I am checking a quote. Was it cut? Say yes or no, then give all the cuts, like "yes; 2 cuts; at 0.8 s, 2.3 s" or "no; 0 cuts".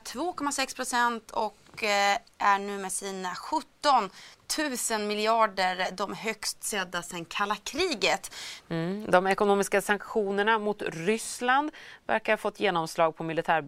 yes; 1 cut; at 8.6 s